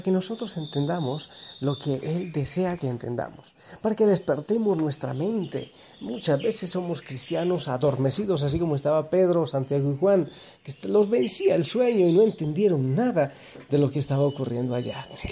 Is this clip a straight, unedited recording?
yes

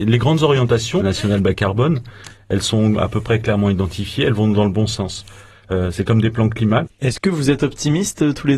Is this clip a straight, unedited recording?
no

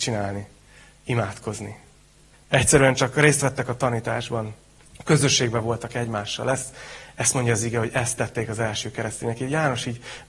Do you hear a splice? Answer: yes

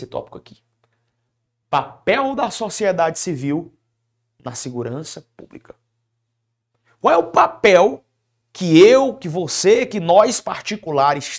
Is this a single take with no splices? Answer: yes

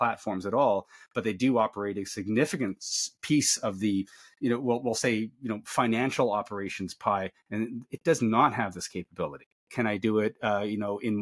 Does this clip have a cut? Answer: yes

